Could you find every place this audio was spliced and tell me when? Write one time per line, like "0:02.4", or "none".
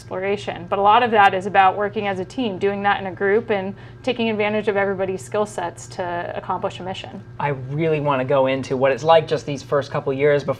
none